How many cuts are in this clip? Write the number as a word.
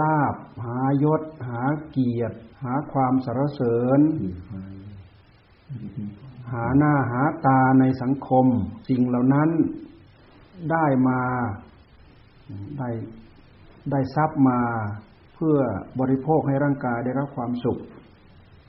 two